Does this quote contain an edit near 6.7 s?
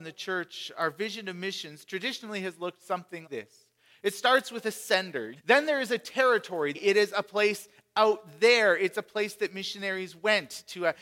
yes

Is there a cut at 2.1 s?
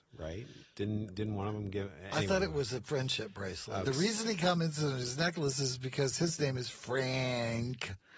no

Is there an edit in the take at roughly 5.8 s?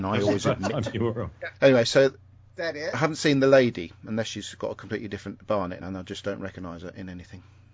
yes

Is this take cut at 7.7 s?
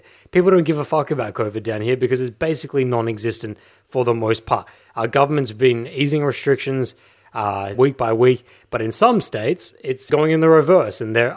yes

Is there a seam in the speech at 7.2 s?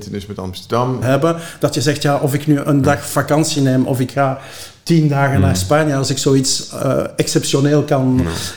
no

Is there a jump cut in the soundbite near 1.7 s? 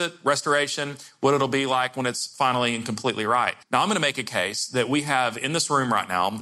no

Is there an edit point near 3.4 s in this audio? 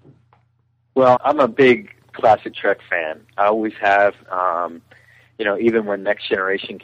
no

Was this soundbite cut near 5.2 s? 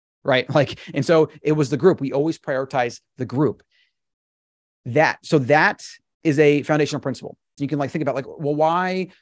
no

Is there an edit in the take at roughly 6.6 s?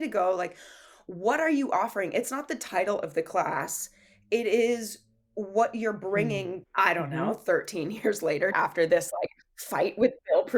yes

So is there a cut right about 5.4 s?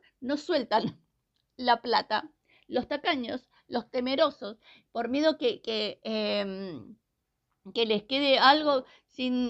no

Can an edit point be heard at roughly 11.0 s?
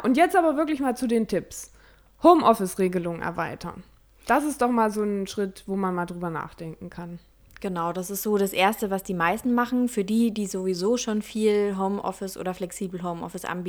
no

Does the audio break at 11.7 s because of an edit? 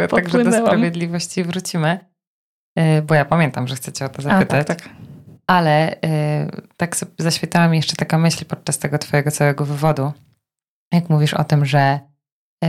no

